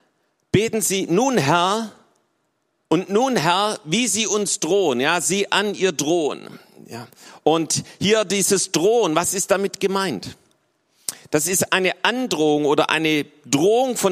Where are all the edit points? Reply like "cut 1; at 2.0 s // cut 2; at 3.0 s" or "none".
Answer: none

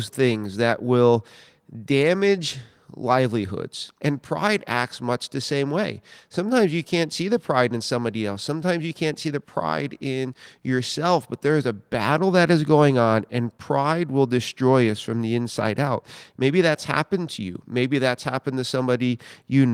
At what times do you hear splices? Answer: cut 1; at 4.0 s

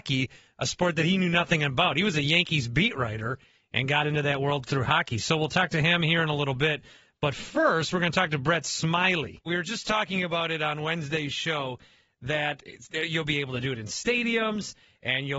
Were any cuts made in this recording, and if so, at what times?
cut 1; at 9.5 s

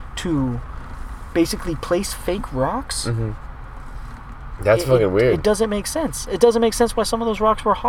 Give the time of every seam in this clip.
none

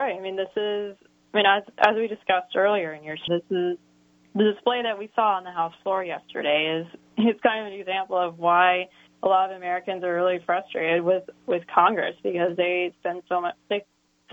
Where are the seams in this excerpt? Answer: cut 1; at 3.3 s

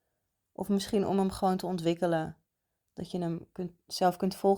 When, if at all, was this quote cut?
none

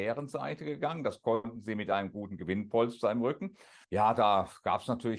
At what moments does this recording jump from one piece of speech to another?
cut 1; at 3.8 s

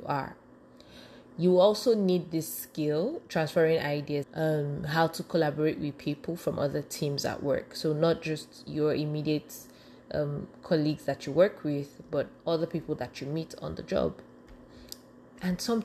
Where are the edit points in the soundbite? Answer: cut 1; at 4.2 s

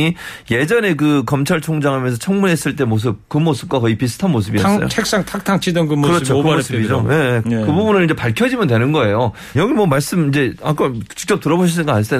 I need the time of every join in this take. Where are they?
cut 1; at 7.4 s // cut 2; at 9.5 s

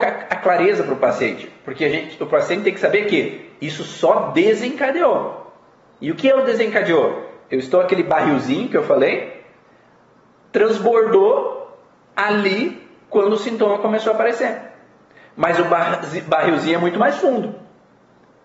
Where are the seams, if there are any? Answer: none

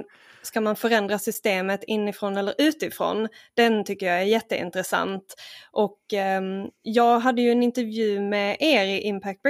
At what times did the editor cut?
none

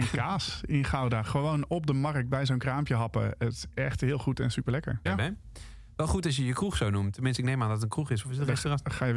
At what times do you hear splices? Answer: cut 1; at 5.1 s

